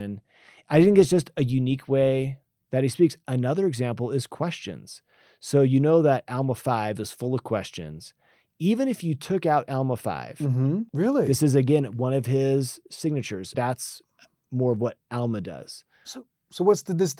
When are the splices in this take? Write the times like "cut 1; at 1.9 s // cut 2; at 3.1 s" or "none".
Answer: cut 1; at 10.9 s // cut 2; at 13.5 s